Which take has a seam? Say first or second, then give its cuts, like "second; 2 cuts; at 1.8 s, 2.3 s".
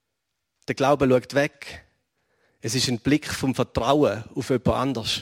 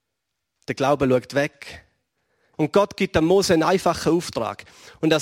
second; 1 cut; at 2.5 s